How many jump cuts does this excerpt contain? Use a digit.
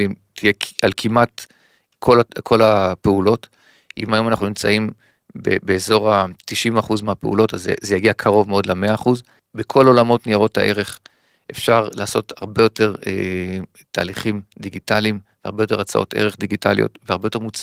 0